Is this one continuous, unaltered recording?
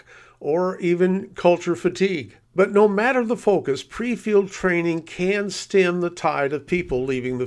no; 1 cut; at 2.4 s

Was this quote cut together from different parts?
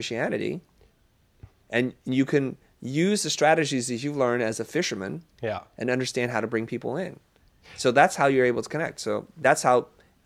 no; 0 cuts

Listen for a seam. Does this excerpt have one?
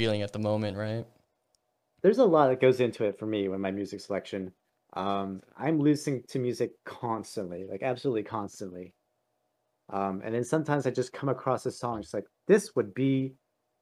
no; 0 cuts

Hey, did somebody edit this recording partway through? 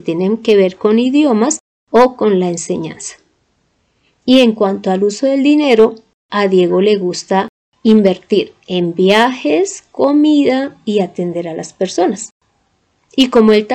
no; 0 cuts

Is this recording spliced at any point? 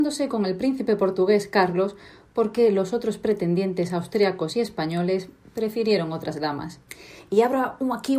no; 0 cuts

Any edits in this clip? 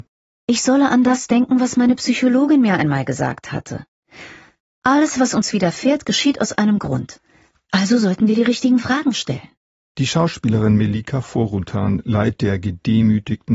no; 0 cuts

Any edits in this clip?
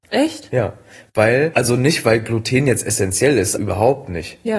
yes; 2 cuts; at 1.5 s, 3.6 s

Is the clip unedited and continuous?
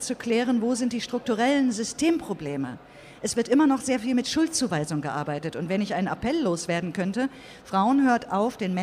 yes; 0 cuts

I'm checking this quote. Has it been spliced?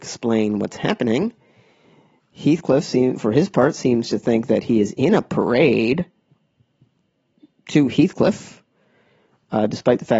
no; 0 cuts

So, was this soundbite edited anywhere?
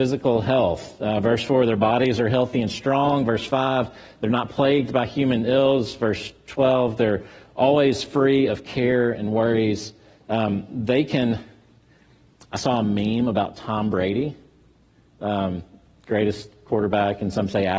no; 0 cuts

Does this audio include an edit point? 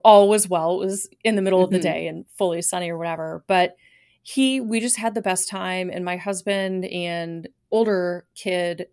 no; 0 cuts

